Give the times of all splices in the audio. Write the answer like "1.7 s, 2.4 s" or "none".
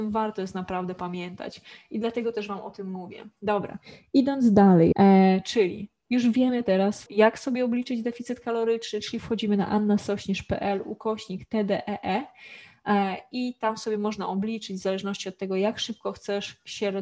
4.9 s, 7.1 s